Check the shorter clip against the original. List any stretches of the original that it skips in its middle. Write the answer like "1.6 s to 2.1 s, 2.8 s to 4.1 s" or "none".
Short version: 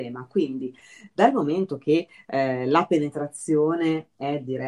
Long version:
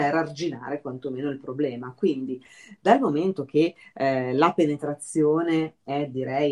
none